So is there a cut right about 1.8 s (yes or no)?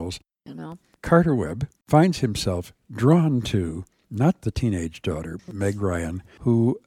yes